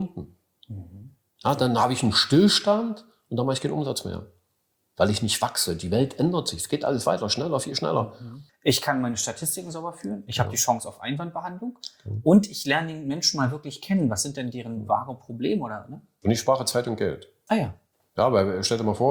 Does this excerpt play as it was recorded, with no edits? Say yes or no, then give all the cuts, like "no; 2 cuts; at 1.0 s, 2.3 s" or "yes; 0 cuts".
no; 1 cut; at 8.5 s